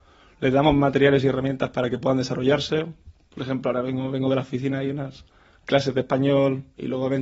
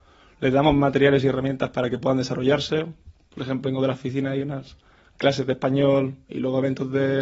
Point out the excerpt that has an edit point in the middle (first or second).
second